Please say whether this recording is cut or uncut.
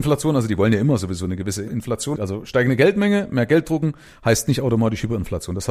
cut